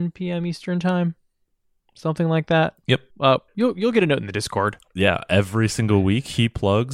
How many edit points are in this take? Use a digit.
2